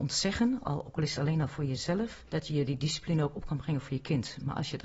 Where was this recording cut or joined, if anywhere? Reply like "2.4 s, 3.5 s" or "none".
2.3 s